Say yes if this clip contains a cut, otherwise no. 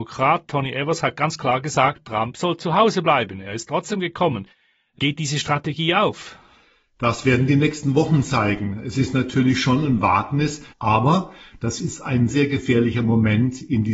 yes